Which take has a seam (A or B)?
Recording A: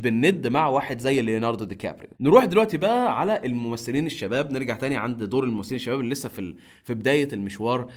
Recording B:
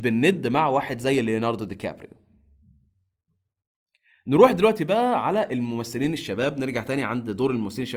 A